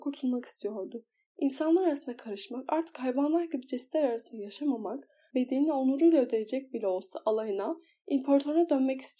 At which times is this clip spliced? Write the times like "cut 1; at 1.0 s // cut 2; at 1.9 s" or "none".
cut 1; at 5.3 s